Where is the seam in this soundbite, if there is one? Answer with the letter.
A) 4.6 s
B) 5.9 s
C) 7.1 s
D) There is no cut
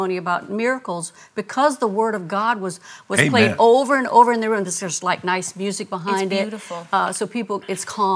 D